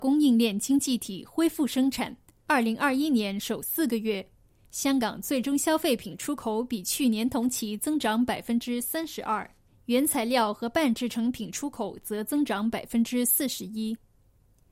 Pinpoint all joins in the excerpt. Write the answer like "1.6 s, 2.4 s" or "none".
2.3 s